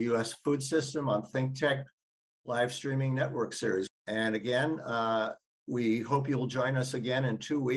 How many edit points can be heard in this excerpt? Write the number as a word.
one